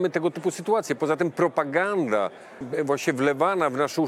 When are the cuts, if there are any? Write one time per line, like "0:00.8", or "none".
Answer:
0:02.6